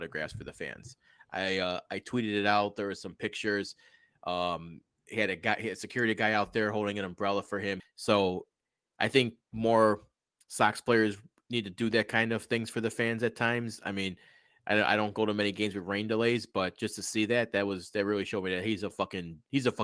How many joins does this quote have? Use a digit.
1